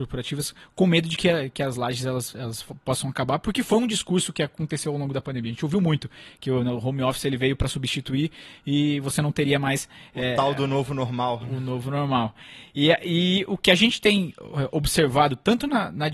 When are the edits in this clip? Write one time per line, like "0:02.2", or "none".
none